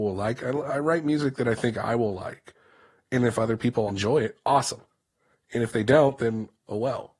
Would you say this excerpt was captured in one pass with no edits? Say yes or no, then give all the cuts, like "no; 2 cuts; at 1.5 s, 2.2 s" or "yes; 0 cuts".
no; 1 cut; at 3.9 s